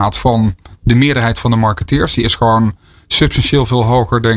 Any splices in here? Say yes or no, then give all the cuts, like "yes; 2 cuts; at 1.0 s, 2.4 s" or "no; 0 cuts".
no; 0 cuts